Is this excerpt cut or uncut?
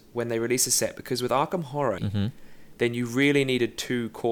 cut